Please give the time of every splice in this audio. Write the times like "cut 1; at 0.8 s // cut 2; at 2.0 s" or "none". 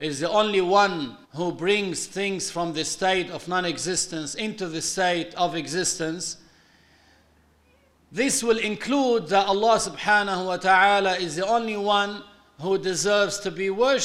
cut 1; at 1.2 s